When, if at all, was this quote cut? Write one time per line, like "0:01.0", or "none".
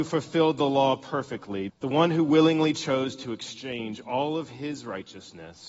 0:01.7